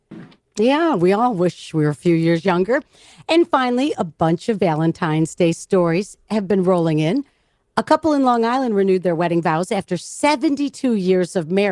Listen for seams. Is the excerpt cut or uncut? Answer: uncut